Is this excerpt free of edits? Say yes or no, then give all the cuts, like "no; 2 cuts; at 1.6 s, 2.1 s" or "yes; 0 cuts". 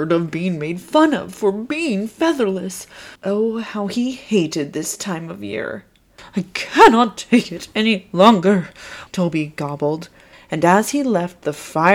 no; 3 cuts; at 3.2 s, 9.1 s, 10.3 s